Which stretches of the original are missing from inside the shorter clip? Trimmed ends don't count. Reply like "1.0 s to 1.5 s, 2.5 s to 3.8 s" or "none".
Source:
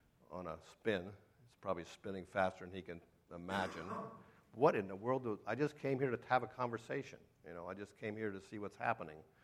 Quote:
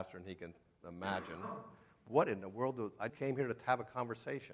5.6 s to 5.7 s